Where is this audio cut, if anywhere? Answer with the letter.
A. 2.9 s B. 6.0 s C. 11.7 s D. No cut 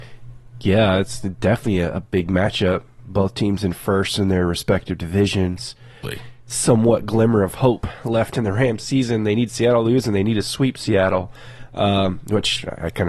B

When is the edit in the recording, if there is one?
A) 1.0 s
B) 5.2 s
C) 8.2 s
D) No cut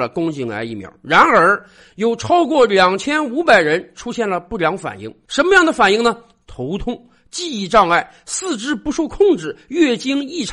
D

